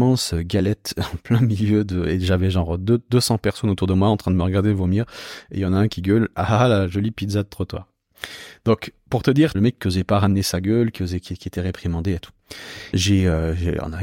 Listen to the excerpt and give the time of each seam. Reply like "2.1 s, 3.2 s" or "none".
9.5 s, 12.9 s